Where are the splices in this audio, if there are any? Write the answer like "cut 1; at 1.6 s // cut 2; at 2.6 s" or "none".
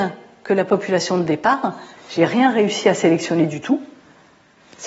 none